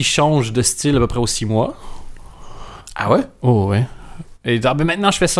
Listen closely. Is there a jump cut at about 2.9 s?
no; 0 cuts

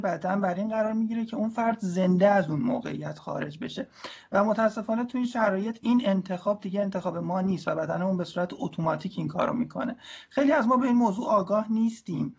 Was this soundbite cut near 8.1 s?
no; 1 cut; at 5.8 s

